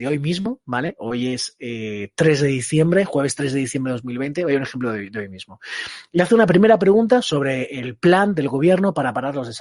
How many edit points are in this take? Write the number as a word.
zero